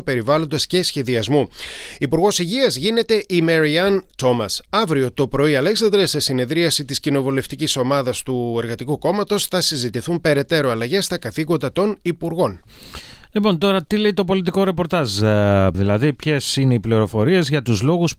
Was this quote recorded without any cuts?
no; 1 cut; at 15.7 s

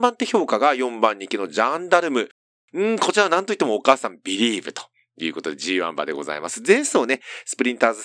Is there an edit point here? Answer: no; 0 cuts

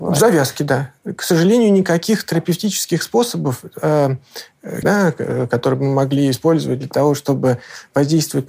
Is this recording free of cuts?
no; 1 cut; at 4.8 s

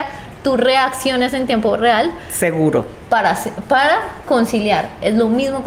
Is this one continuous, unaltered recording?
yes; 0 cuts

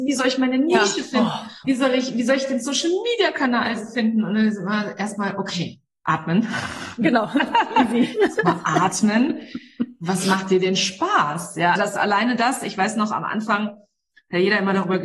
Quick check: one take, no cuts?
no; 2 cuts; at 1.6 s, 11.8 s

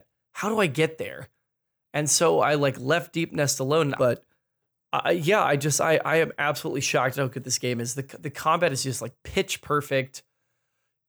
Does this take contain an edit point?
yes; 1 cut; at 4.0 s

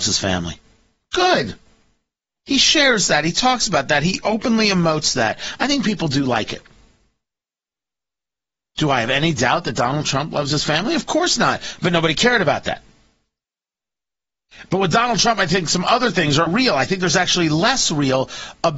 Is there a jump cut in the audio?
yes; 1 cut; at 16.5 s

